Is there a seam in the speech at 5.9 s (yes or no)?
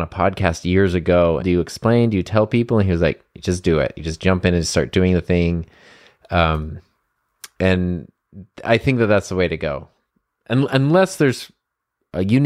no